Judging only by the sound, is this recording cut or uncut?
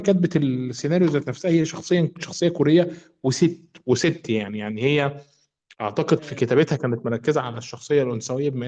uncut